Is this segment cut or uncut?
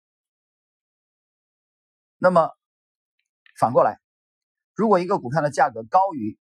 uncut